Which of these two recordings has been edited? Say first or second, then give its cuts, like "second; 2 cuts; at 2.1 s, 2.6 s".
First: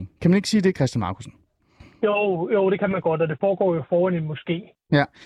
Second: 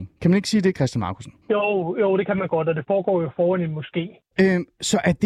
second; 2 cuts; at 1.4 s, 4.3 s